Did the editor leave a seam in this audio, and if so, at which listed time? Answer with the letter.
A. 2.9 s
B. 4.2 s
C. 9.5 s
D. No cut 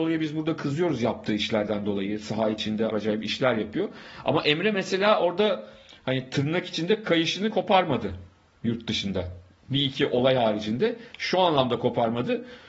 A